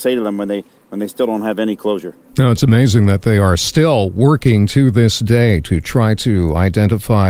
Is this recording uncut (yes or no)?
yes